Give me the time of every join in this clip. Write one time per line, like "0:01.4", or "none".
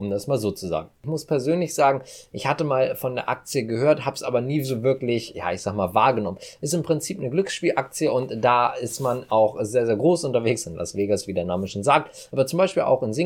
none